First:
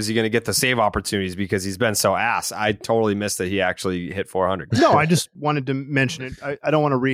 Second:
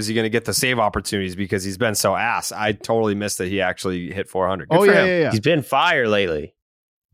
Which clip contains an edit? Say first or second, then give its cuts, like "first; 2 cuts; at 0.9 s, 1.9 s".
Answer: first; 1 cut; at 4.7 s